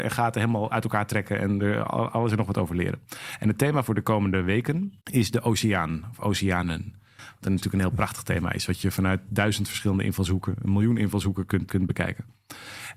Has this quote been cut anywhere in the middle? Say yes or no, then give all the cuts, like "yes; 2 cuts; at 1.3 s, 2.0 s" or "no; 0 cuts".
yes; 2 cuts; at 5.0 s, 11.7 s